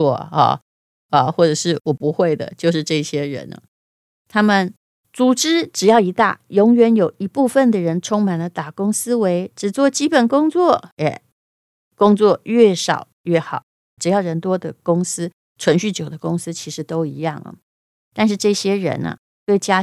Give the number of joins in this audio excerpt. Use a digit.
2